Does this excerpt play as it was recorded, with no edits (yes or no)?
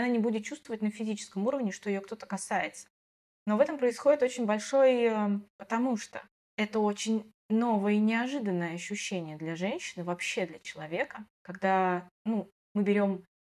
no